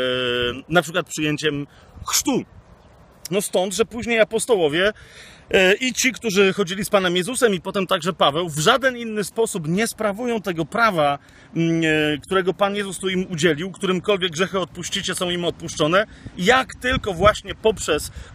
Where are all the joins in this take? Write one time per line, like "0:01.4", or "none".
0:03.3